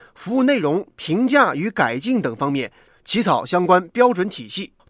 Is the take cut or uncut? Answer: uncut